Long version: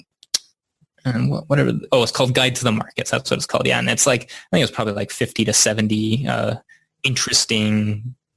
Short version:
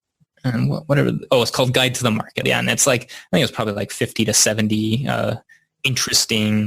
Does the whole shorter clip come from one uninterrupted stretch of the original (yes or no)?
no